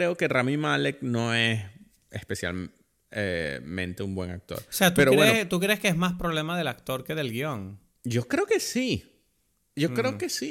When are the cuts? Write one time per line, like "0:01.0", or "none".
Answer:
none

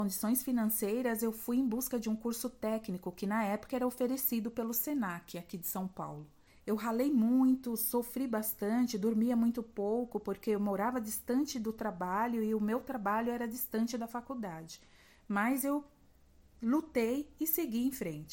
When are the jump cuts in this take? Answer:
0:06.5

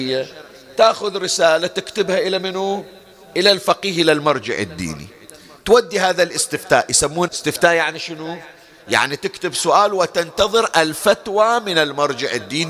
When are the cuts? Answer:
0:07.3

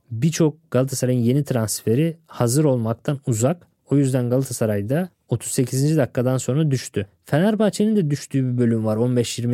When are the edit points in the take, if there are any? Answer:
none

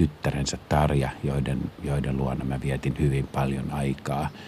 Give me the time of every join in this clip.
none

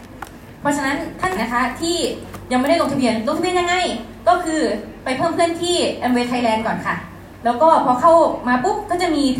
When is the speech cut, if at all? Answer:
0:01.4

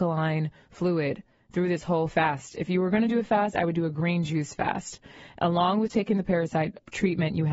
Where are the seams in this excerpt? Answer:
none

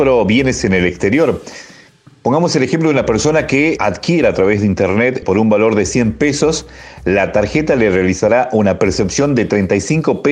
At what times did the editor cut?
0:03.8
0:05.2

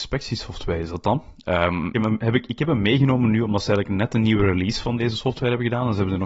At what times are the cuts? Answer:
0:01.9

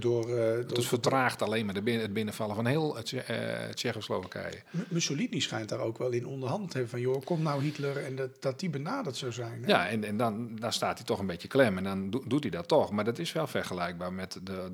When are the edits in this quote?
none

